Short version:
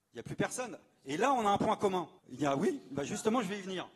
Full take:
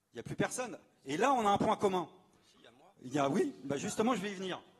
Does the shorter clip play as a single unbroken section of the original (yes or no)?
no